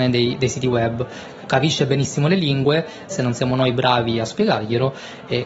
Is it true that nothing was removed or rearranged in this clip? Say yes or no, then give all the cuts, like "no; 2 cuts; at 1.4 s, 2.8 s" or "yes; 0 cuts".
no; 2 cuts; at 1.4 s, 3.1 s